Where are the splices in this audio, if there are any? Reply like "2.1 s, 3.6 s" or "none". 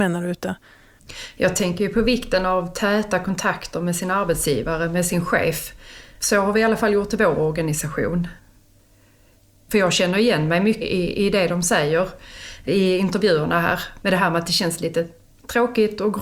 10.8 s